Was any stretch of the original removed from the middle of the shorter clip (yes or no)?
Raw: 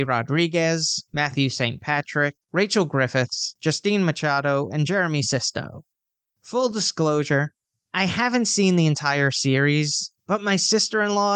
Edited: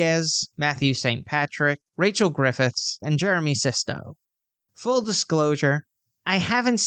yes